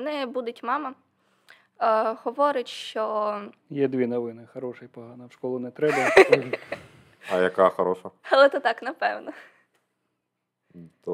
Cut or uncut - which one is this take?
cut